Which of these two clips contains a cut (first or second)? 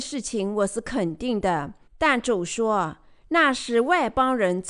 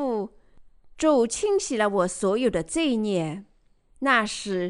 first